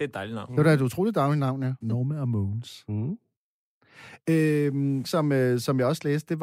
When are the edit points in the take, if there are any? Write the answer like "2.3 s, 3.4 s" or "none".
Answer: 1.8 s, 5.0 s

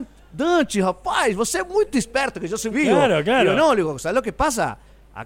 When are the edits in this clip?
2.7 s

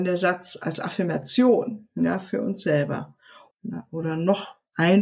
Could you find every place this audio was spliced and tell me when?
3.5 s

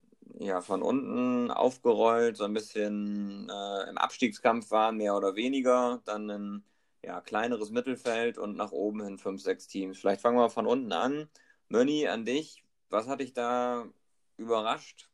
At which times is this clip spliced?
none

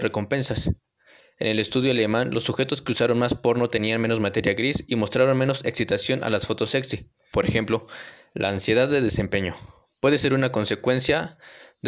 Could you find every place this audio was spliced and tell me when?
7.3 s

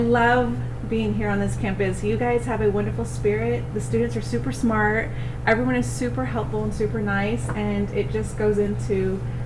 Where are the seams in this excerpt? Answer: none

